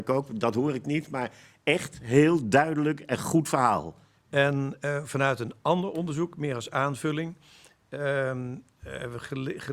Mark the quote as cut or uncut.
cut